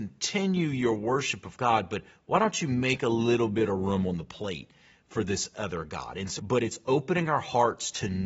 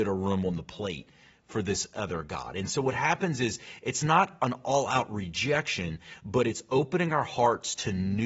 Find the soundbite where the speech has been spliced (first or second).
first